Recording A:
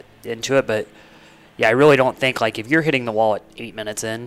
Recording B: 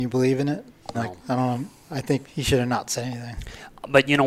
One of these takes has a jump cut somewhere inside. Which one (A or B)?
B